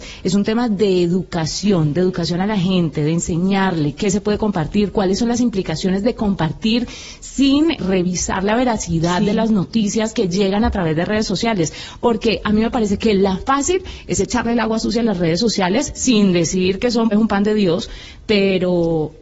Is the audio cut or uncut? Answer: cut